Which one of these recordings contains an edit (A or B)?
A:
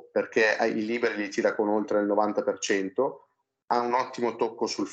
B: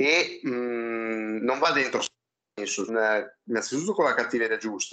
B